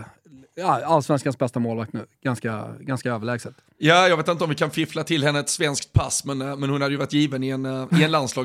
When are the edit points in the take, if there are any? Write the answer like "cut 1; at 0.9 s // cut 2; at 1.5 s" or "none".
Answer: none